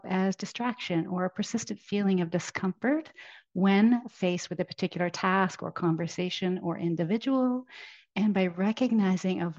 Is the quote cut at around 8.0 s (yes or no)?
no